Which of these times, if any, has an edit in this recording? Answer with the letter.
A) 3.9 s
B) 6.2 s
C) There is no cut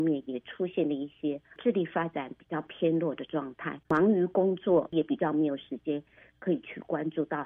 A